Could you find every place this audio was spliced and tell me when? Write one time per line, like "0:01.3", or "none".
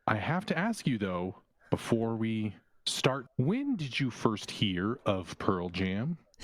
0:03.3